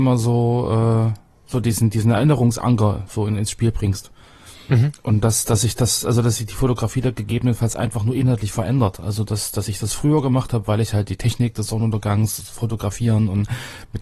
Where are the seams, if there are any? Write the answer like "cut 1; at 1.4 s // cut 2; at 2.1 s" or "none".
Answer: none